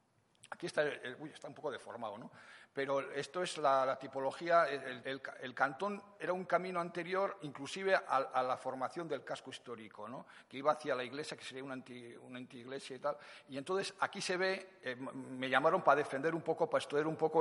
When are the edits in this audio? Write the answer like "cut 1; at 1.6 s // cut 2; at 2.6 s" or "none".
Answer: cut 1; at 5.0 s